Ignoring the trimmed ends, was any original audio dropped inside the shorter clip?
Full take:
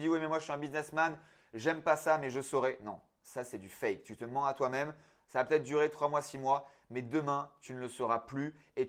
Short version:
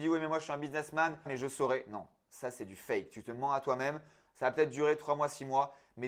yes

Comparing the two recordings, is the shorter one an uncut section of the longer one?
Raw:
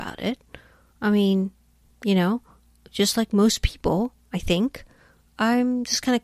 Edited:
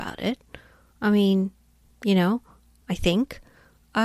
no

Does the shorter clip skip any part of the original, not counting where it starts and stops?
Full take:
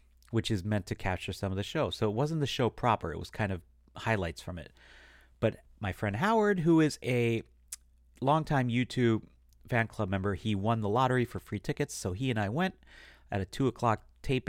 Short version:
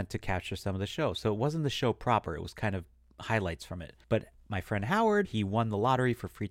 yes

